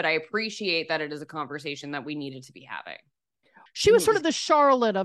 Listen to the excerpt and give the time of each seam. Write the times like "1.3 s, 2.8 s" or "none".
3.7 s